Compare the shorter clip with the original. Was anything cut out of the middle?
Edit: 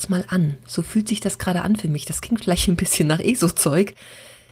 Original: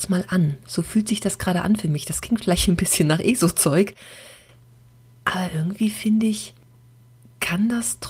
no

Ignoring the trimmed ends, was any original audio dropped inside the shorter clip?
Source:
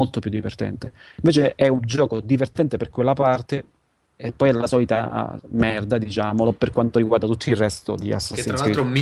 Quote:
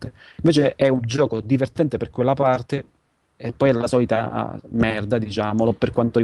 no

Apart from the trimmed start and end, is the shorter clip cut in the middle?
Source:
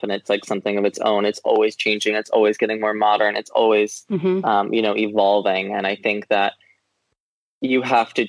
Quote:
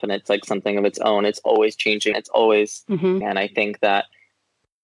yes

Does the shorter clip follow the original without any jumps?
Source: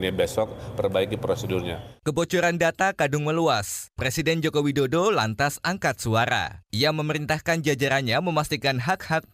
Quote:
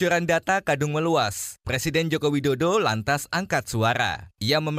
yes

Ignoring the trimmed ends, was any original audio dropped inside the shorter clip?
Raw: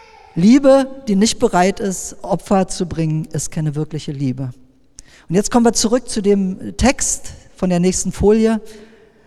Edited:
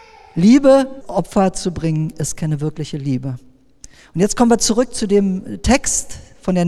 yes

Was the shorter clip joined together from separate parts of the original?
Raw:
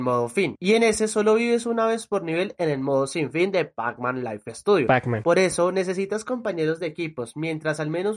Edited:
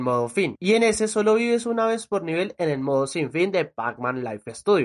no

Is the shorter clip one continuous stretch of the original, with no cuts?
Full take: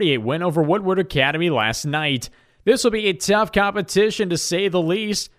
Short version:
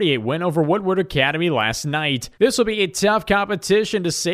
no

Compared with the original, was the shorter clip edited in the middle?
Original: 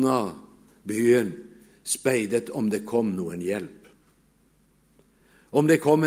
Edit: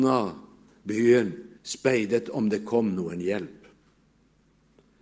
yes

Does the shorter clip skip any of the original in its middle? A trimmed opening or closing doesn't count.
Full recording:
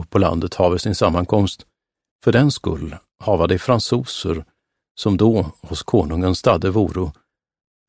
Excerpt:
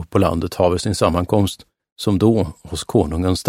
yes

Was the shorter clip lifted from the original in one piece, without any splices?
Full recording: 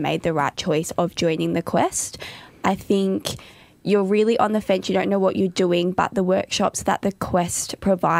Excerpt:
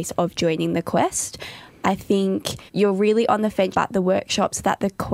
no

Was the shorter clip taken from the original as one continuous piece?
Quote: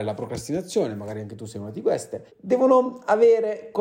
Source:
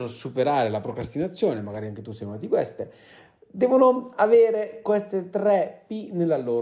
no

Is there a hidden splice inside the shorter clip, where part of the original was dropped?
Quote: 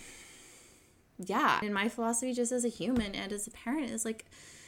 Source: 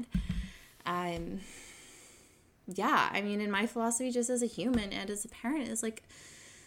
yes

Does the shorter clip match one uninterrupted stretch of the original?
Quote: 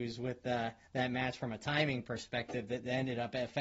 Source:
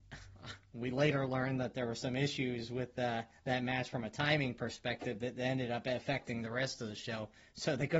yes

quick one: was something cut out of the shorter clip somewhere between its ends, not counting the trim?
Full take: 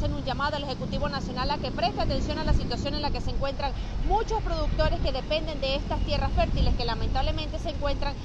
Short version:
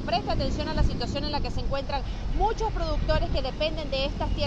no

